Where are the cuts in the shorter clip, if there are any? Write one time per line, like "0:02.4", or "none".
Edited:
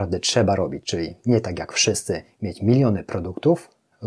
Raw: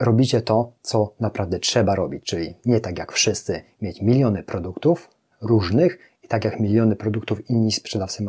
none